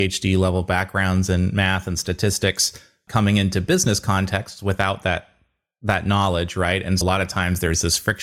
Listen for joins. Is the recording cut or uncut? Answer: cut